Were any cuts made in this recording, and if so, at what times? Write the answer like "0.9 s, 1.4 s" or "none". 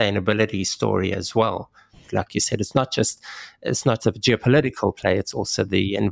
2.1 s, 4.0 s